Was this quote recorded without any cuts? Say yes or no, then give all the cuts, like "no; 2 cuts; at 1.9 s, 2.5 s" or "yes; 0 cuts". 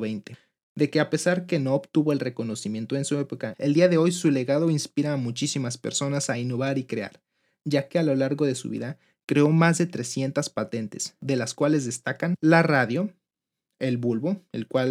yes; 0 cuts